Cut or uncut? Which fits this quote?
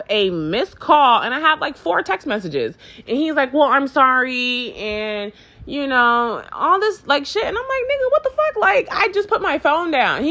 uncut